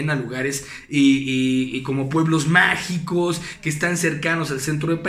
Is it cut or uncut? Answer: uncut